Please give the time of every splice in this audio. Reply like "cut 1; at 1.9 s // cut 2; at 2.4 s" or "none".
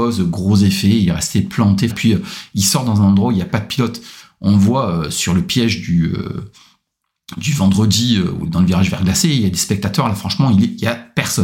cut 1; at 1.9 s